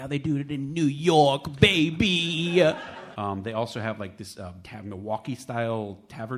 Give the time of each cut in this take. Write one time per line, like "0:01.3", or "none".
0:03.1
0:04.6